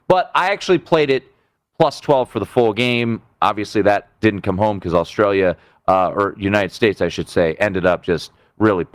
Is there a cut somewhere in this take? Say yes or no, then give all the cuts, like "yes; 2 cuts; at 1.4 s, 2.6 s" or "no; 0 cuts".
no; 0 cuts